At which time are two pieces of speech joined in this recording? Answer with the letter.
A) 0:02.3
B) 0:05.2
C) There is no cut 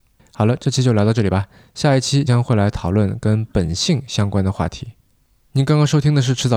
A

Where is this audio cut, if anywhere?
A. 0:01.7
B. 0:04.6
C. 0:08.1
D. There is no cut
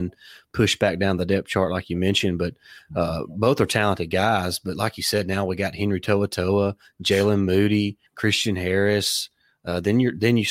C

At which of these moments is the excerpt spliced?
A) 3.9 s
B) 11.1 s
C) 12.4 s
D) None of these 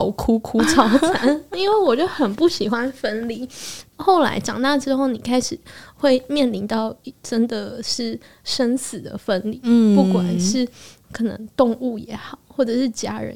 D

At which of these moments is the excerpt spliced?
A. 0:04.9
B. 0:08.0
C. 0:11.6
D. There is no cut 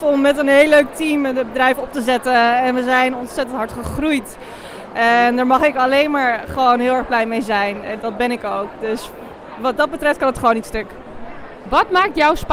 B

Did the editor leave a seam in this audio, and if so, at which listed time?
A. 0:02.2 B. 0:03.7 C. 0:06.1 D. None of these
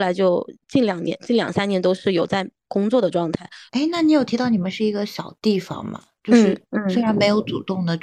B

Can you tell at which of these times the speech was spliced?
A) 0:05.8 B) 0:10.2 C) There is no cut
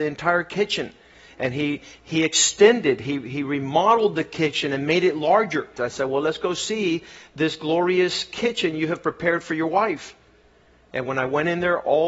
A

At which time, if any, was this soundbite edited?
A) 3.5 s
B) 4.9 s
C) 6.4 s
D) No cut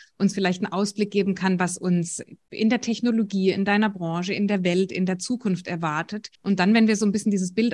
C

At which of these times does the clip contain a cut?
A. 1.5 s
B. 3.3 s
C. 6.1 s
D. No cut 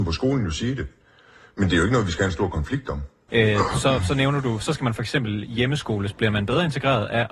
B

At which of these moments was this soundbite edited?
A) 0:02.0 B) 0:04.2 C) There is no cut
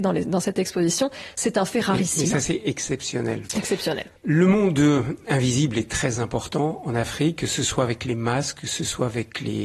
B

